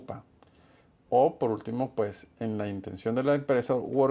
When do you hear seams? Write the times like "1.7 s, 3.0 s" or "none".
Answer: none